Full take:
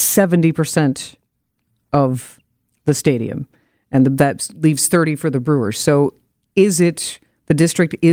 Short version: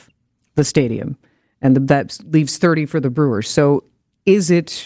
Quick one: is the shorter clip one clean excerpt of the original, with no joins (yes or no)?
yes